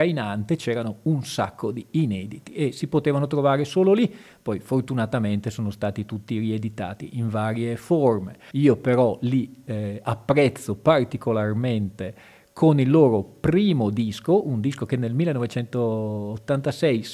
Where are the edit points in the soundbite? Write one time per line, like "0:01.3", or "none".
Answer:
0:08.5